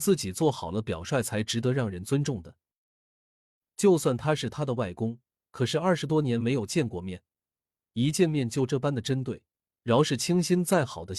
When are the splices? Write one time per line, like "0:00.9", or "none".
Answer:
none